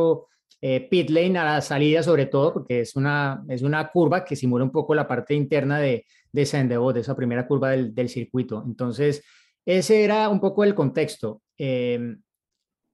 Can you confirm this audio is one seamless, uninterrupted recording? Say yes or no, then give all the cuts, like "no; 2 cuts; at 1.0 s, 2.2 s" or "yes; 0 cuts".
yes; 0 cuts